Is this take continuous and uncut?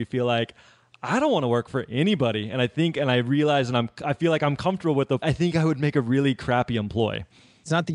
no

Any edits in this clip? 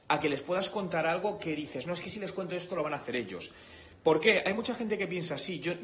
no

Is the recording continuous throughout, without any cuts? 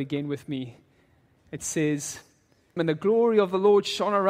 no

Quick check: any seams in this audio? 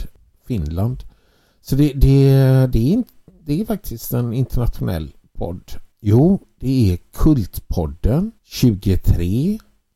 yes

